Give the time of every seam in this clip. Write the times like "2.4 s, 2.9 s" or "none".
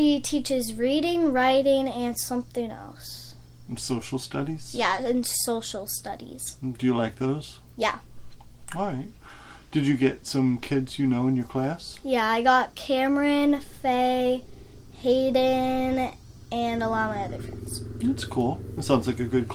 none